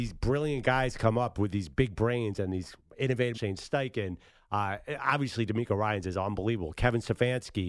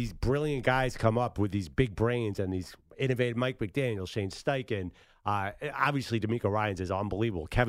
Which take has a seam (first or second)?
first